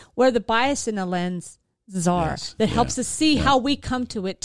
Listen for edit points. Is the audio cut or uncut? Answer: uncut